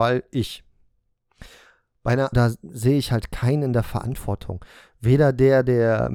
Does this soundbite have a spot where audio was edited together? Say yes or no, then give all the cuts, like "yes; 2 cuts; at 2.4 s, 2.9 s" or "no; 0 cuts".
yes; 1 cut; at 2.3 s